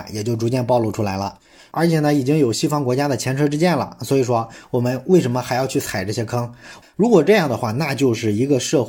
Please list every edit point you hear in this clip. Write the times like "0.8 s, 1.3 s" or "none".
6.8 s